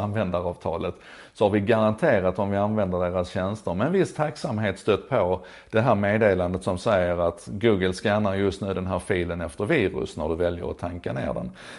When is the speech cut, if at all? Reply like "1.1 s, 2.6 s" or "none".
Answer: none